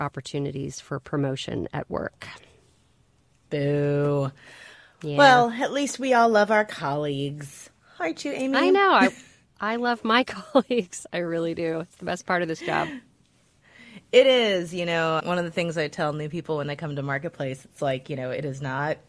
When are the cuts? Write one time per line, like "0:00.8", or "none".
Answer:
0:15.2